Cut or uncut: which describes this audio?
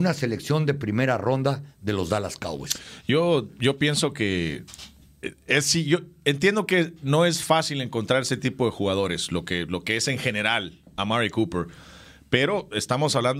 uncut